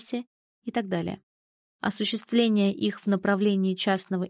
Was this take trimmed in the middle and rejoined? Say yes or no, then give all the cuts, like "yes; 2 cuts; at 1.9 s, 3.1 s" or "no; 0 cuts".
no; 0 cuts